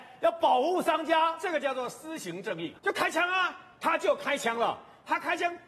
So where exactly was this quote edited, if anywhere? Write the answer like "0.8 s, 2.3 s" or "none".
2.8 s